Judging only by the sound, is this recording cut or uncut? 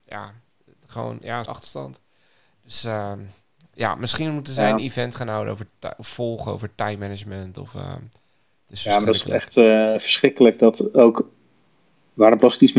cut